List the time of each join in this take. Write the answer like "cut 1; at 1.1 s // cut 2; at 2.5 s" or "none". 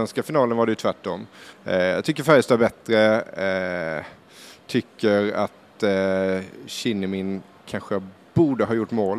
cut 1; at 1.5 s